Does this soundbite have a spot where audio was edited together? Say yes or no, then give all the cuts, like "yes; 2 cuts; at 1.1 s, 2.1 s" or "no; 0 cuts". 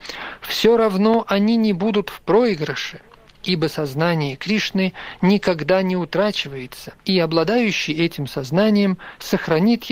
yes; 1 cut; at 7.0 s